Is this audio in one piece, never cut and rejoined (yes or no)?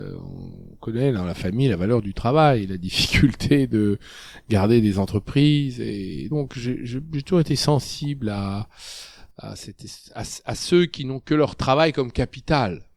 yes